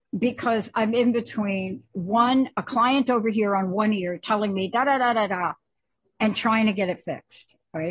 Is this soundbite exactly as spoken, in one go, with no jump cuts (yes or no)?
yes